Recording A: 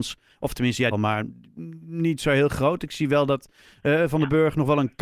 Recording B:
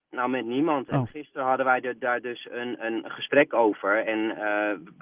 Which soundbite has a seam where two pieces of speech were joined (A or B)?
A